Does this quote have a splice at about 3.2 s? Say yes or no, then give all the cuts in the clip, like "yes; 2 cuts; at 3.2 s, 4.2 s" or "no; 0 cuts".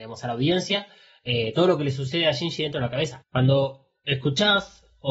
yes; 1 cut; at 3.2 s